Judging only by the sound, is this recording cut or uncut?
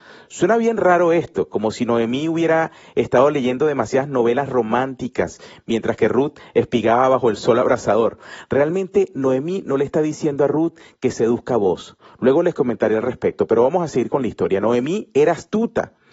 uncut